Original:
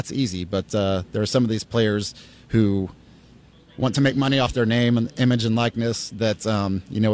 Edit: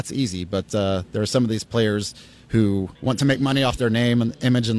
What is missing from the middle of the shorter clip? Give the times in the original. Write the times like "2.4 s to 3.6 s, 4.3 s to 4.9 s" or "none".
3.0 s to 3.7 s